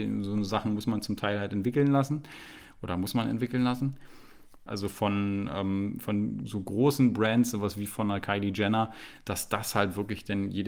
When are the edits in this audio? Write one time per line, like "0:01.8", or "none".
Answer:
0:04.7